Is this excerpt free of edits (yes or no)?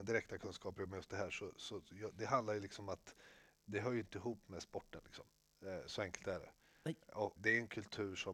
no